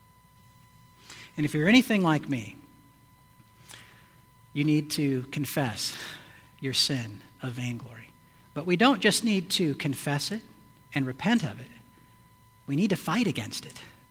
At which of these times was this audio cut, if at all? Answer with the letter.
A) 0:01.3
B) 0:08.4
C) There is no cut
B